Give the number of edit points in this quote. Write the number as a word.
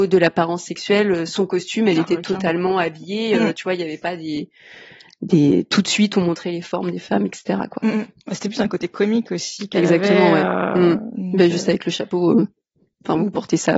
zero